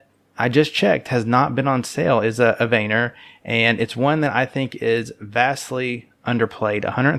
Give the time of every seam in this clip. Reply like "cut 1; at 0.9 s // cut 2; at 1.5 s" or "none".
none